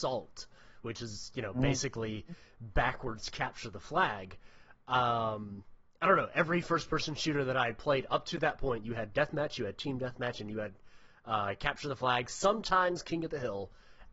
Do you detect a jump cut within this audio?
no; 0 cuts

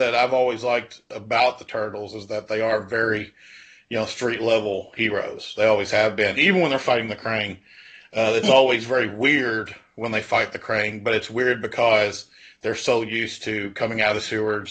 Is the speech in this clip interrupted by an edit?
yes; 1 cut; at 6.3 s

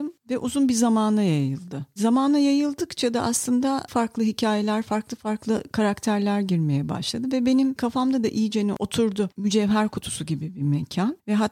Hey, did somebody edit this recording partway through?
yes; 2 cuts; at 3.9 s, 9.4 s

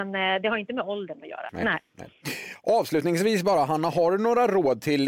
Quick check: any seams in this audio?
yes; 1 cut; at 1.5 s

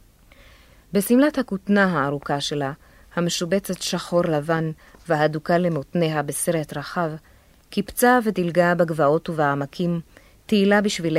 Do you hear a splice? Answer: no; 0 cuts

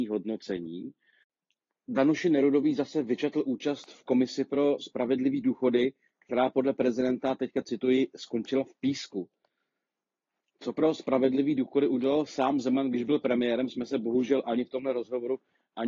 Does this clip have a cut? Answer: no; 0 cuts

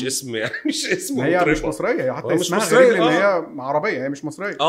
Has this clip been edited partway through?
no; 0 cuts

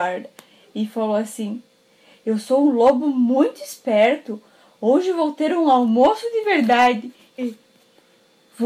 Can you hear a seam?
yes; 1 cut; at 7.4 s

